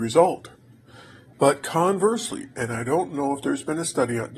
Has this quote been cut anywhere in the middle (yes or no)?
yes